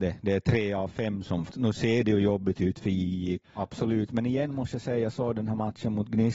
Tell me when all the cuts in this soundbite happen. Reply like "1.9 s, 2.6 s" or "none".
1.5 s, 3.4 s